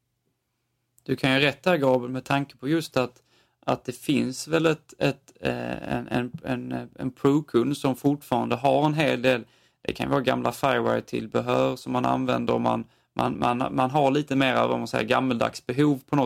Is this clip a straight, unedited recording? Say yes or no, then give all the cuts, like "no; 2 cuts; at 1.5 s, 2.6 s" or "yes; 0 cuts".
yes; 0 cuts